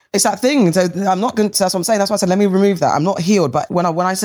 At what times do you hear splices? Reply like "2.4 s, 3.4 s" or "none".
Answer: none